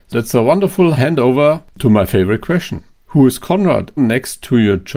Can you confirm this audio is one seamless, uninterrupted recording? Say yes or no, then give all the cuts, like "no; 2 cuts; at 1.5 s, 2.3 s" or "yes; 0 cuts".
no; 1 cut; at 4.0 s